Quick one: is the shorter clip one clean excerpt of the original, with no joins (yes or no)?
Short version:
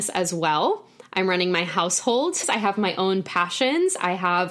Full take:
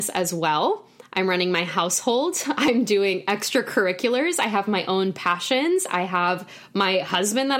no